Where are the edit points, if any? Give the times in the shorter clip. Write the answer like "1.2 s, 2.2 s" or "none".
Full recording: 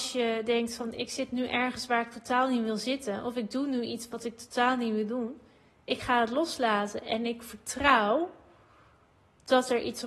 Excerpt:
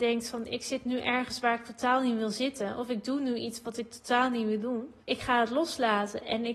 5.0 s